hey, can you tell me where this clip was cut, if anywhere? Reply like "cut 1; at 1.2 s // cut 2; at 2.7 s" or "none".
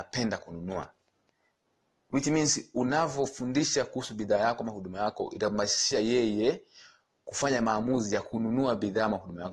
none